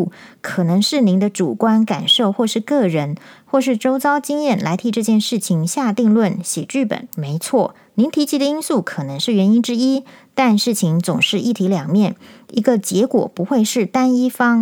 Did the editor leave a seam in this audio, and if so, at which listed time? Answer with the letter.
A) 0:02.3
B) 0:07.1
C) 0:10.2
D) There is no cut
B